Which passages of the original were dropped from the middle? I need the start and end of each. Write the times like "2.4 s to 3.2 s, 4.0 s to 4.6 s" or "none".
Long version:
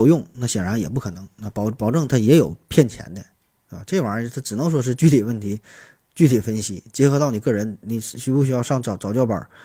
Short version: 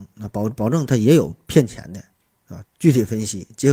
3.9 s to 6.0 s